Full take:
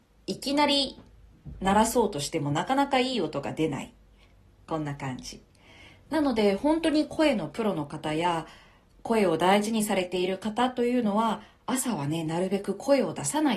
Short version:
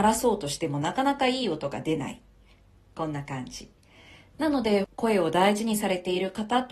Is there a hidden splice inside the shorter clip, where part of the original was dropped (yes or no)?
yes